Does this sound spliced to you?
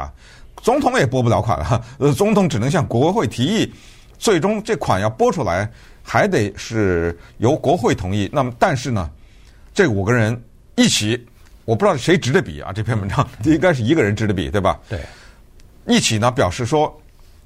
no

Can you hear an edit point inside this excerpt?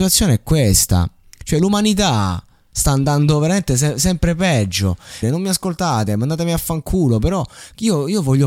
yes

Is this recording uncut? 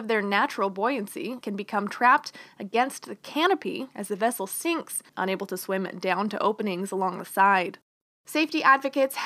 no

